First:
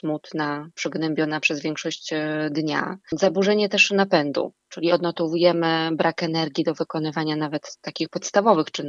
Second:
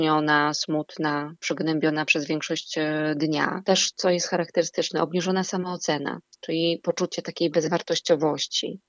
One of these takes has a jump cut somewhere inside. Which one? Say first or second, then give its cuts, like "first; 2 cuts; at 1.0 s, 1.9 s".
second; 1 cut; at 3.6 s